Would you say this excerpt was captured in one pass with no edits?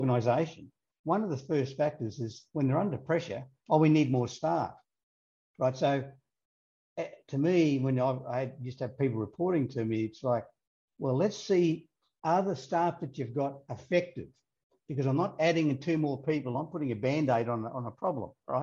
yes; 0 cuts

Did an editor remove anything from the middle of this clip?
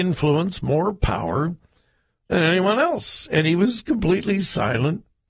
no; 0 cuts

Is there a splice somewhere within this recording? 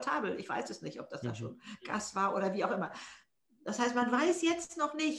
no; 0 cuts

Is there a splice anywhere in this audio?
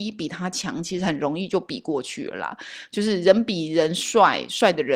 no; 0 cuts

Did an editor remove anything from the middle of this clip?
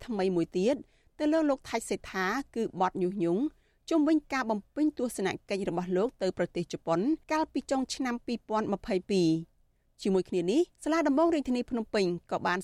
yes; 2 cuts; at 7.2 s, 10.7 s

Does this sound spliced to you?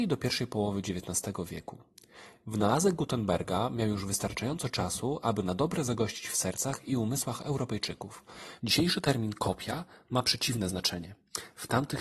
yes; 1 cut; at 8.6 s

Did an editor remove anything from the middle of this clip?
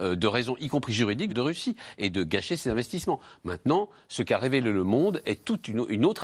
yes; 1 cut; at 1.3 s

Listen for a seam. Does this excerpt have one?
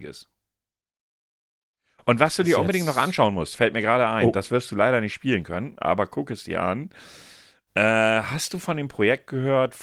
no; 0 cuts

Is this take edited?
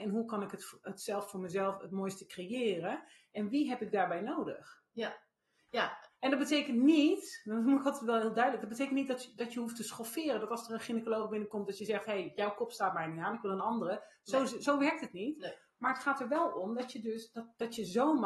yes; 1 cut; at 5.7 s

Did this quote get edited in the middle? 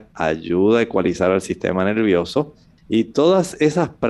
yes; 1 cut; at 2.8 s

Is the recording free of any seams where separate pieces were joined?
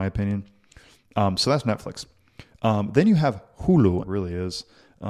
no; 1 cut; at 4.0 s

